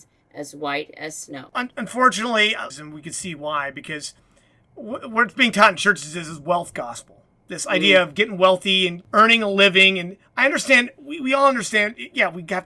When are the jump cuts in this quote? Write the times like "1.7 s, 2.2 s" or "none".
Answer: 2.7 s